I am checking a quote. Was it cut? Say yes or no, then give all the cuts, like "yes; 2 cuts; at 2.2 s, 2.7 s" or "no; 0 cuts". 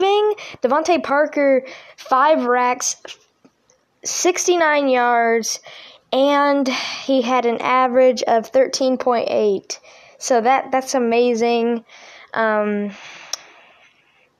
no; 0 cuts